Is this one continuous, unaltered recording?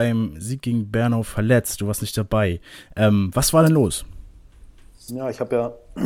yes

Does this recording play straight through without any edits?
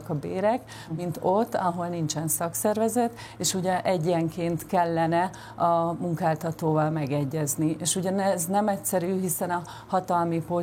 yes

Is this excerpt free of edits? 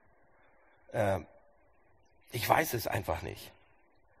yes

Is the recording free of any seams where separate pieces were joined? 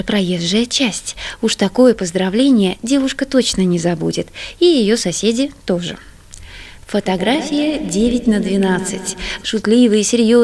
no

